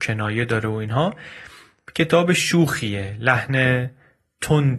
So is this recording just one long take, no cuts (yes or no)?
yes